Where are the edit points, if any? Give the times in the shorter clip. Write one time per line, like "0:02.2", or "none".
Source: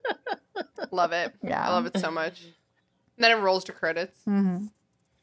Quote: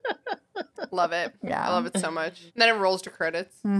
0:02.5